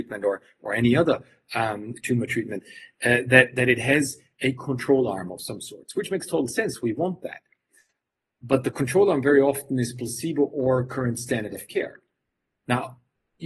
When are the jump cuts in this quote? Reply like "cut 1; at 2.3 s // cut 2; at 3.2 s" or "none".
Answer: none